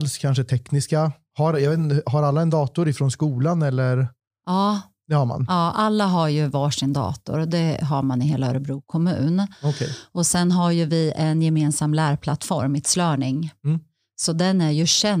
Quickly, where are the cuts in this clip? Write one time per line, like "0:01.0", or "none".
none